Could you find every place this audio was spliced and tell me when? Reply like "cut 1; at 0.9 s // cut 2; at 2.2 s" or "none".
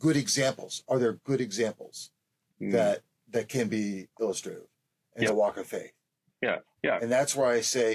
cut 1; at 5.3 s // cut 2; at 6.8 s